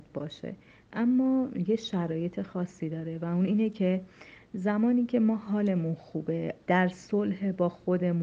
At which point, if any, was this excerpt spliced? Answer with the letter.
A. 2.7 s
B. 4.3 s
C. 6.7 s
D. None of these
C